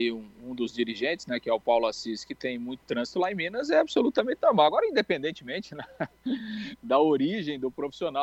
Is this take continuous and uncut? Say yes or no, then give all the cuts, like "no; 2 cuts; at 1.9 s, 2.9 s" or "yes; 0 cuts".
yes; 0 cuts